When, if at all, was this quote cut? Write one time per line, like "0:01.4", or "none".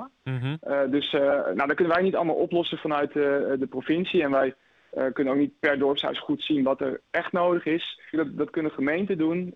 0:08.1

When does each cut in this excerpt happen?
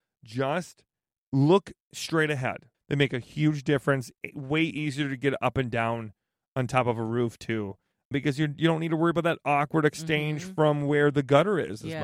0:02.7

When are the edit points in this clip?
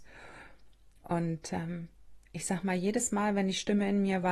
none

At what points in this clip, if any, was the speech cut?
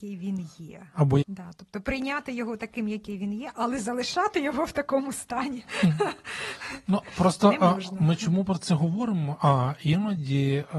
0:01.2

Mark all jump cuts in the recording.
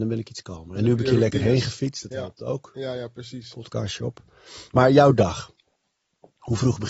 none

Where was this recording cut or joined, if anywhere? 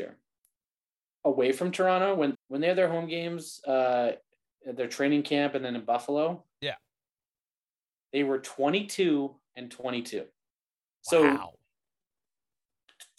0:02.3
0:11.0

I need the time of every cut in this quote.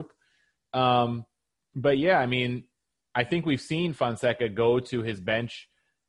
none

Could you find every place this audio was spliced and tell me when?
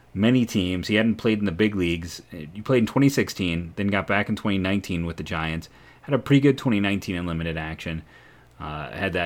none

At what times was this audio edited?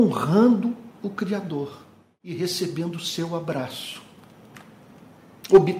none

